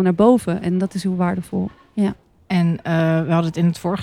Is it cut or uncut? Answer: uncut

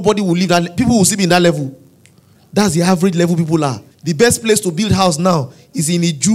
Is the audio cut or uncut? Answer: cut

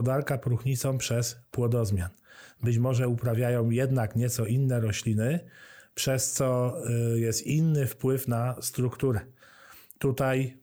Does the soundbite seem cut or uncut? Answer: uncut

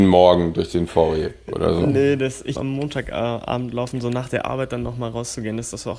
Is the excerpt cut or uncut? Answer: cut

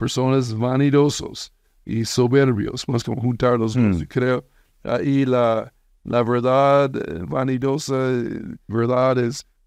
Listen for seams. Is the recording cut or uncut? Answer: cut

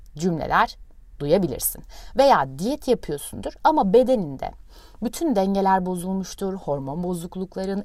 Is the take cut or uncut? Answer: uncut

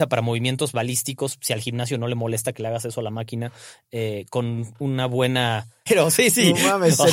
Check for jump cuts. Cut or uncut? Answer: cut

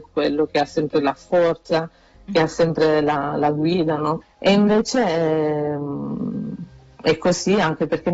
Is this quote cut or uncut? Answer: cut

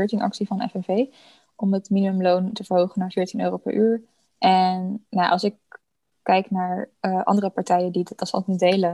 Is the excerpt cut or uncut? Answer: uncut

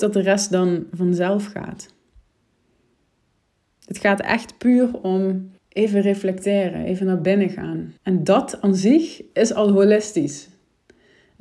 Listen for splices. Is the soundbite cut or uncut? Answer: cut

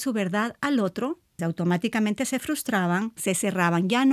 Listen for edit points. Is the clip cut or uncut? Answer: cut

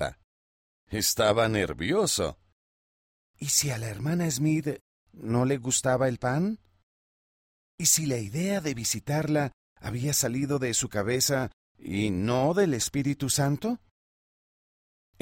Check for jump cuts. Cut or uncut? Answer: uncut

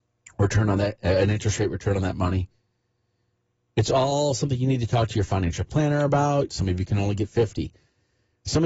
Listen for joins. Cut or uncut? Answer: cut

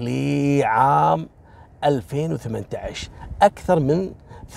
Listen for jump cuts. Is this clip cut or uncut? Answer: uncut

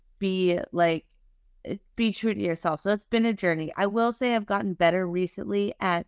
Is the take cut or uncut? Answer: uncut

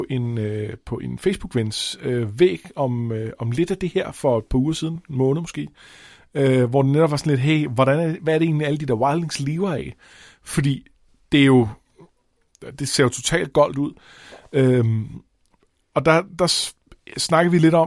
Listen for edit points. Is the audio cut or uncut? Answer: uncut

